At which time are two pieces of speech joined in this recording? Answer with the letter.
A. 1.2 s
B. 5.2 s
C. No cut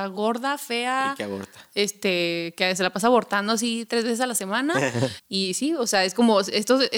B